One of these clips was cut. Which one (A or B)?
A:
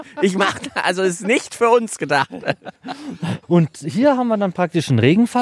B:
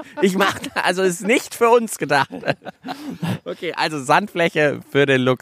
A